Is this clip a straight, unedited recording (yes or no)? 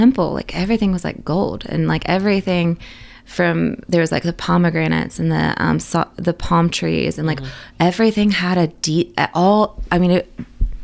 yes